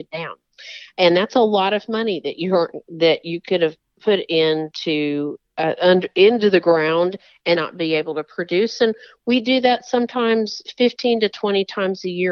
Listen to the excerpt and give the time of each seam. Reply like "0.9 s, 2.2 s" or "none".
7.6 s